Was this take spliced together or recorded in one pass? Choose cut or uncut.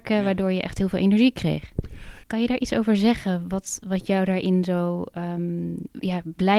cut